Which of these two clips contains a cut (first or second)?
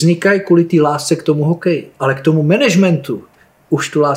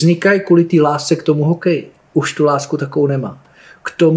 second